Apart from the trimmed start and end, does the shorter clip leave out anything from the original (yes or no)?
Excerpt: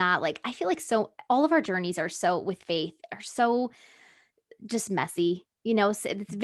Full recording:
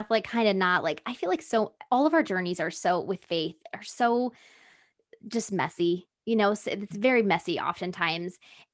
no